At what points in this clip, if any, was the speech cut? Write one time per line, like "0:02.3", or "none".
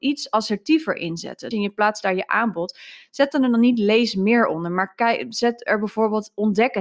0:01.5